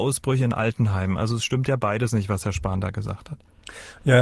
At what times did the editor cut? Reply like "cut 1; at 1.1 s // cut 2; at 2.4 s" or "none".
none